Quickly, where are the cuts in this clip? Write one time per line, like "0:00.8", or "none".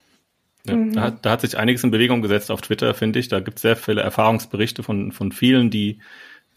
0:03.8